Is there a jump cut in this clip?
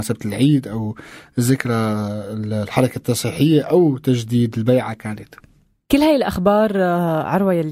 no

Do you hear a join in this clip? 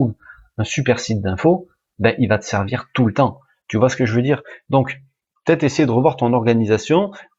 no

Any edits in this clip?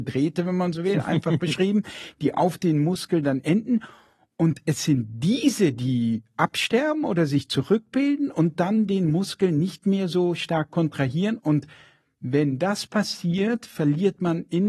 no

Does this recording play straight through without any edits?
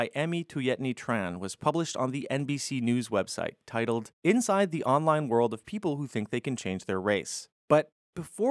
yes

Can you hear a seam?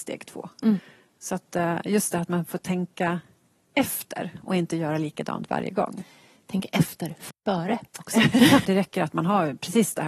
yes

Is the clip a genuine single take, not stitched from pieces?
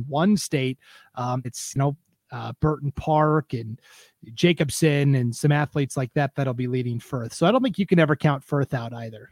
no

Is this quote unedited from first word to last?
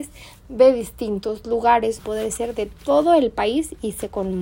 no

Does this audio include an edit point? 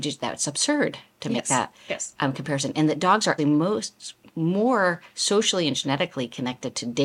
yes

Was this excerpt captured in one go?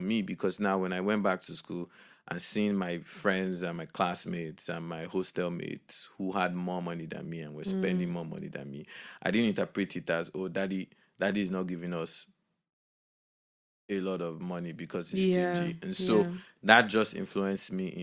yes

